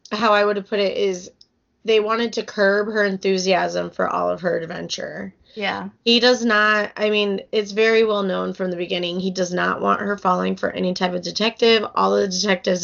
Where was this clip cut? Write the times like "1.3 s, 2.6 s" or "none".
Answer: none